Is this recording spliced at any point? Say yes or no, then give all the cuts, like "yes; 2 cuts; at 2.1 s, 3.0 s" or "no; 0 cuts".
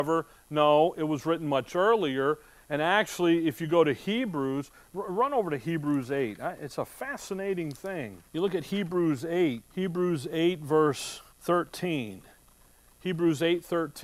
yes; 3 cuts; at 8.3 s, 9.7 s, 11.3 s